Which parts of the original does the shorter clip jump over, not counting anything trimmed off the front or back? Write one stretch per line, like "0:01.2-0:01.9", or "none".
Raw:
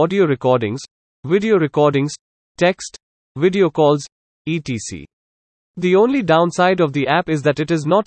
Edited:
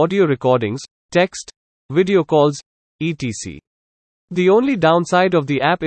0:00.9-0:02.4